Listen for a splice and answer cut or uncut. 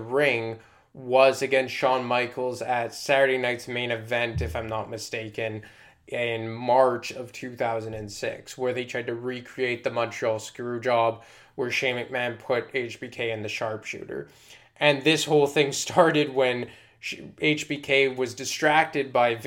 uncut